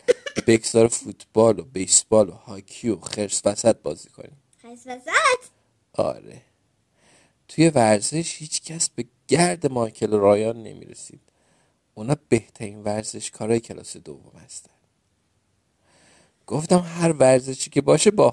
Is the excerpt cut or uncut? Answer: uncut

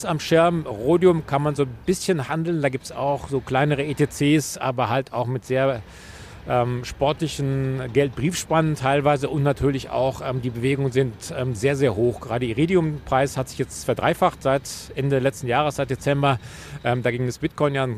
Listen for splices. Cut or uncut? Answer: uncut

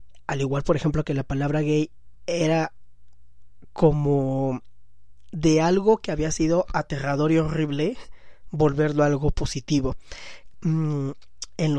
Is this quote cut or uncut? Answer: cut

